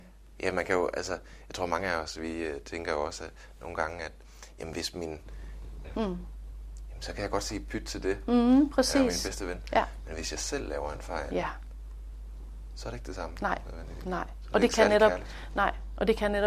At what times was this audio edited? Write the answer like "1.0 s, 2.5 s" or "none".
5.8 s